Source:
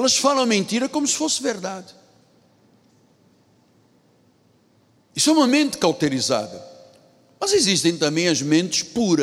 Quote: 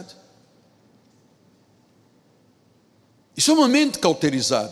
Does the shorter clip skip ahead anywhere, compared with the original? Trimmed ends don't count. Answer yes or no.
no